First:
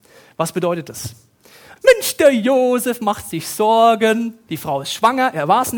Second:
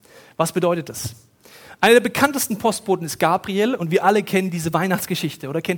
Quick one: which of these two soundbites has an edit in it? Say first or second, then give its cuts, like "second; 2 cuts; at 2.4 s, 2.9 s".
first; 2 cuts; at 1.8 s, 4.5 s